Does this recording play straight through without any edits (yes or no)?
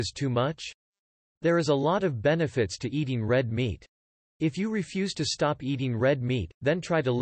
no